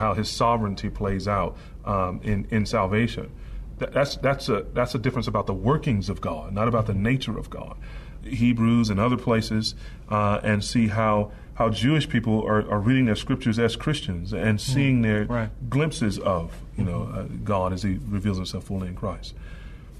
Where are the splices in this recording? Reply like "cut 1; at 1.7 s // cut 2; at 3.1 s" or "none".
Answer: cut 1; at 3.7 s // cut 2; at 8.2 s

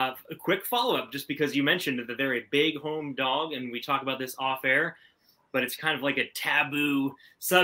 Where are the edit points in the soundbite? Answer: none

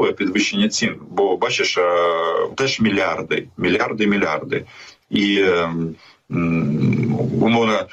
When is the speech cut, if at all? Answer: cut 1; at 2.5 s // cut 2; at 5.0 s

